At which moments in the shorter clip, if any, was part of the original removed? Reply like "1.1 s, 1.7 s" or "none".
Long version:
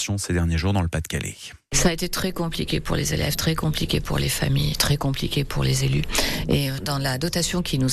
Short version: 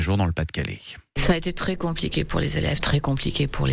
2.8 s